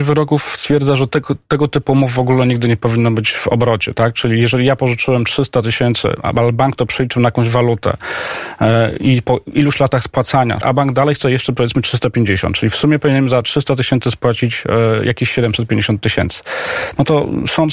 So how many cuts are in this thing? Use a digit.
1